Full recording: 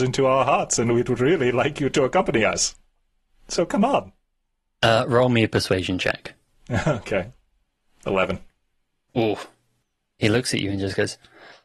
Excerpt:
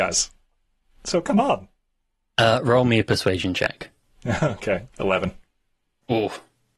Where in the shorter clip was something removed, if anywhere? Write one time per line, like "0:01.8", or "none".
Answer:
0:04.9